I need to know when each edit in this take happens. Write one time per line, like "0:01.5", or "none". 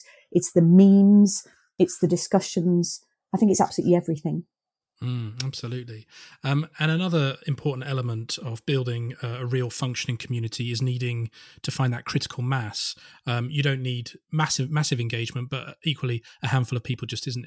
none